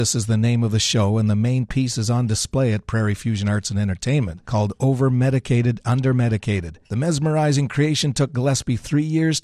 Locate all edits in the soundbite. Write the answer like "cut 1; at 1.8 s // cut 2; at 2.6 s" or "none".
cut 1; at 4.4 s // cut 2; at 6.8 s